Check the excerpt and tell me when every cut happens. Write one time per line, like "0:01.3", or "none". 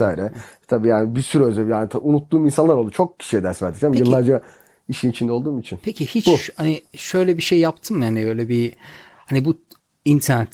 none